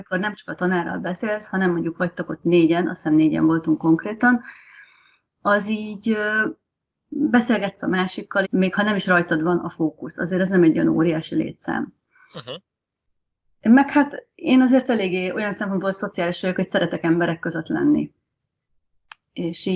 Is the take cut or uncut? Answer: cut